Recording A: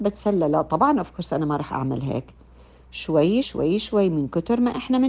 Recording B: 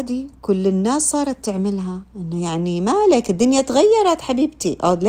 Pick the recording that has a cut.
A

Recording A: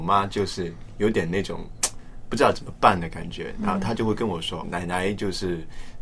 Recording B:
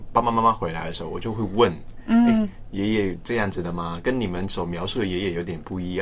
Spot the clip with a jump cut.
A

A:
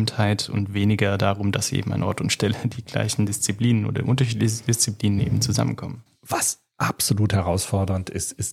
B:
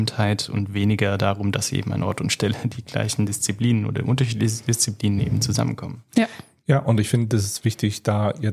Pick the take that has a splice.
A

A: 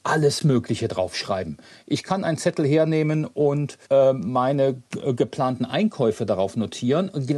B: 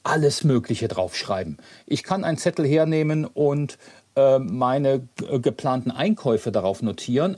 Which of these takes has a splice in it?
A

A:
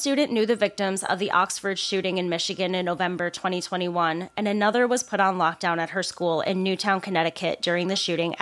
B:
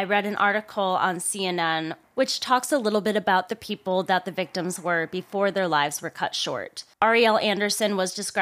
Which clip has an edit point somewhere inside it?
B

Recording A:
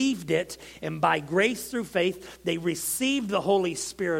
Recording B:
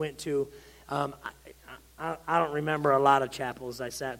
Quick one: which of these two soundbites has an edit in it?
B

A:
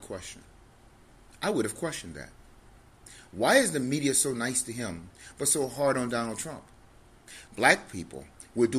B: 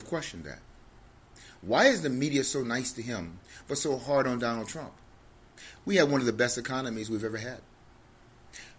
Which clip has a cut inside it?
A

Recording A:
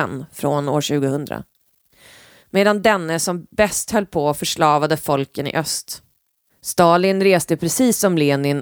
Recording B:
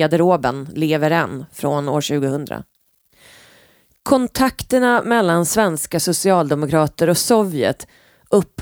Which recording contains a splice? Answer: A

